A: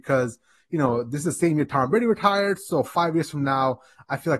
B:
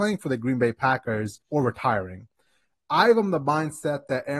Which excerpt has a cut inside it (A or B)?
B